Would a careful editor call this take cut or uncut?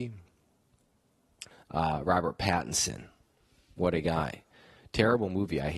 cut